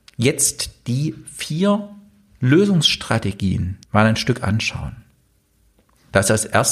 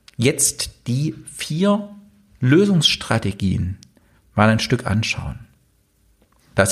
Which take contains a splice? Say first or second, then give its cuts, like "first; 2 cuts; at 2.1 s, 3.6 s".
first; 1 cut; at 3.8 s